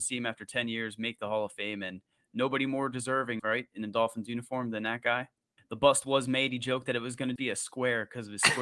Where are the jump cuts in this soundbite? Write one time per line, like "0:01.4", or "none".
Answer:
0:03.4
0:05.6
0:07.4